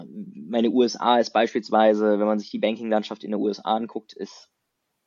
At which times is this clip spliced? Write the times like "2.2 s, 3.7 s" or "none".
none